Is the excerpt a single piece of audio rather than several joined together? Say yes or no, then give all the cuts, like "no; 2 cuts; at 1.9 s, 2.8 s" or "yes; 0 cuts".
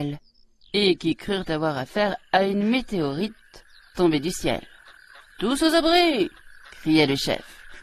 yes; 0 cuts